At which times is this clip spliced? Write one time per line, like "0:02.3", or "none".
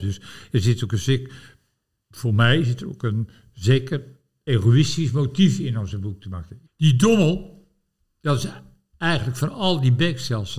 0:06.6